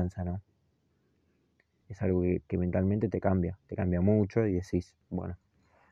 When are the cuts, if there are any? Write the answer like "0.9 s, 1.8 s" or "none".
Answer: 1.8 s